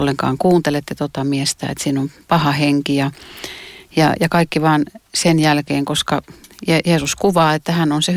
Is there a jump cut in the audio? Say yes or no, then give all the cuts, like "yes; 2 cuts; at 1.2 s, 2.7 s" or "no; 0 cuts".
no; 0 cuts